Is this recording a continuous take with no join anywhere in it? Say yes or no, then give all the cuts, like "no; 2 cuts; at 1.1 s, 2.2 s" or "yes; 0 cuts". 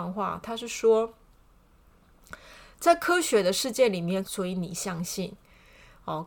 no; 1 cut; at 4.2 s